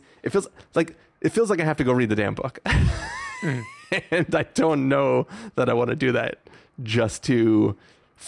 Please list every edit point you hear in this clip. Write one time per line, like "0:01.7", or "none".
none